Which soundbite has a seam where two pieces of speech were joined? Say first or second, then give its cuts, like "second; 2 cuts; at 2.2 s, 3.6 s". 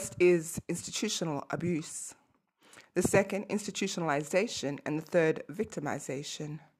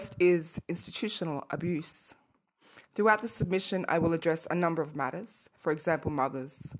second; 2 cuts; at 2.8 s, 5.5 s